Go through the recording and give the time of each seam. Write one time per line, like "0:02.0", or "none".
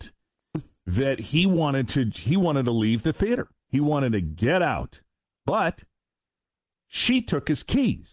none